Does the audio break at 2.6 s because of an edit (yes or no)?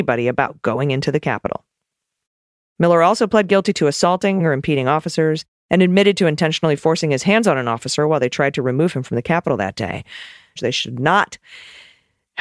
yes